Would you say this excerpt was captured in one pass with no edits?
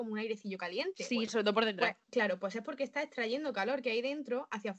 no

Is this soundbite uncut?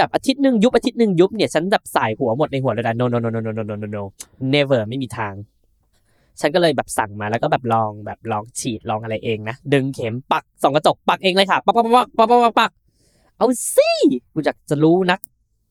yes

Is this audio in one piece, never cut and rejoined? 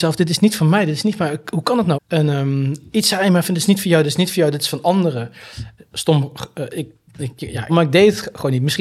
no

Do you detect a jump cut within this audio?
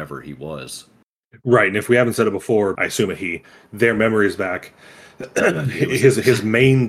yes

